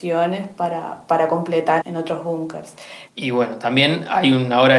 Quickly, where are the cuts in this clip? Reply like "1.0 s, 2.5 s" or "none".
1.8 s, 3.1 s